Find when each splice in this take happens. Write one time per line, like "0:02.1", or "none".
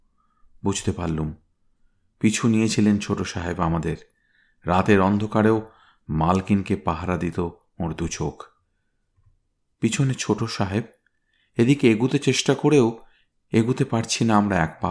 none

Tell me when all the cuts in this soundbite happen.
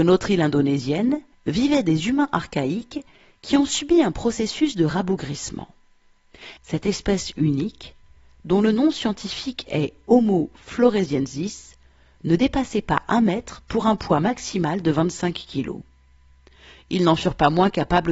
0:01.3
0:06.6

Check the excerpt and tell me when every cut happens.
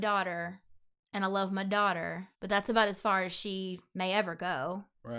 0:02.3

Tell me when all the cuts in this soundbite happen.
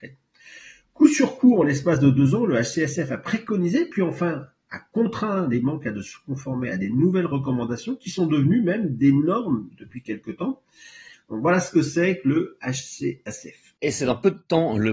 0:11.1

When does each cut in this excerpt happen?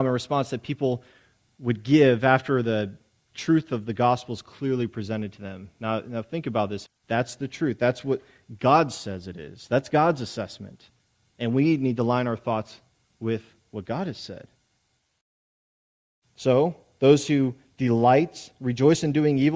0:06.9

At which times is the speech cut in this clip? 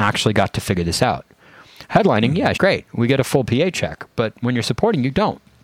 0:02.5

